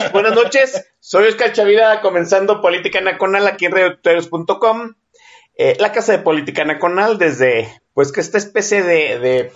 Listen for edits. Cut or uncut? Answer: cut